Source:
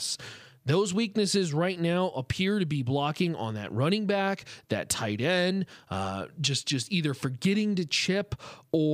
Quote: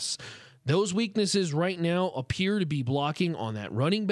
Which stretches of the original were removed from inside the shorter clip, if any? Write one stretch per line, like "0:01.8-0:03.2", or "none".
none